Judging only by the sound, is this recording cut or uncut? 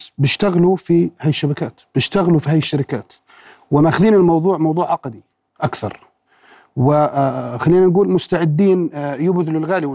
uncut